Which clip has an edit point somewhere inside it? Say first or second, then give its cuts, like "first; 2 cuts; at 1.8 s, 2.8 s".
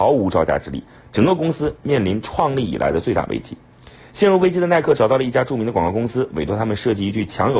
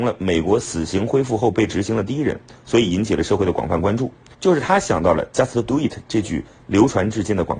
second; 1 cut; at 4.3 s